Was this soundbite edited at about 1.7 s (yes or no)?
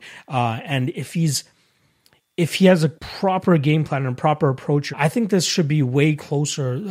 no